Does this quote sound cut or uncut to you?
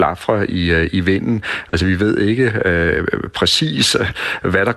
uncut